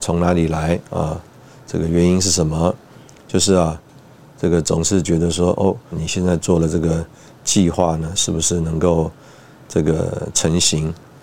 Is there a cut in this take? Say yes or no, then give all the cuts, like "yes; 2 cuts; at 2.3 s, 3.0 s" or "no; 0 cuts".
yes; 1 cut; at 5.9 s